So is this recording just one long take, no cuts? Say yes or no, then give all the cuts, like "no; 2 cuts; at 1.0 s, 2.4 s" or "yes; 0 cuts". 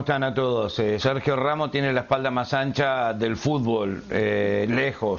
no; 1 cut; at 1.0 s